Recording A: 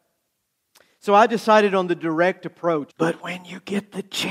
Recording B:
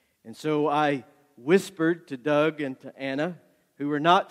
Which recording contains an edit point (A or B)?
A